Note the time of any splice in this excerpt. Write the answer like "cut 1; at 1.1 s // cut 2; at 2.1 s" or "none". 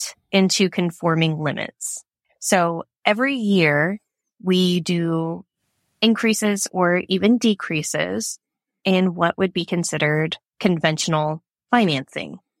none